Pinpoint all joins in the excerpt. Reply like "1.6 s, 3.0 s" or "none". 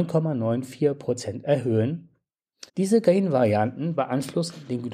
2.7 s